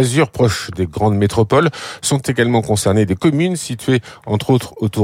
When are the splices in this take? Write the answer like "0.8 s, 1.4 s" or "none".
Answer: none